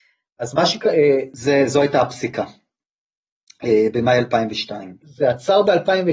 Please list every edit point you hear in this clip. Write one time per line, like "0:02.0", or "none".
0:01.3
0:05.0